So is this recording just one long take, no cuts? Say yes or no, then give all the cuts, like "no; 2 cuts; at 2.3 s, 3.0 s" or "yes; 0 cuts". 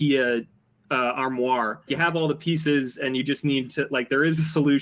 no; 1 cut; at 1.9 s